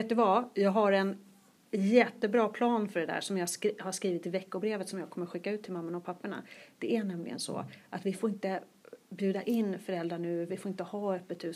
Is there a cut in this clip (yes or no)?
no